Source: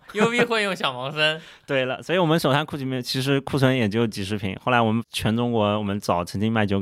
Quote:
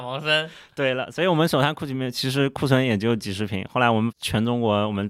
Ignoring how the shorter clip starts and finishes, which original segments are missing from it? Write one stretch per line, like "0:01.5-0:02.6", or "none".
none